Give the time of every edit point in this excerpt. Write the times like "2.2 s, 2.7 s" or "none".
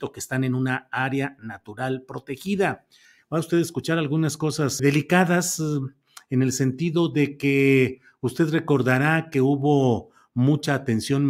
3.2 s, 4.8 s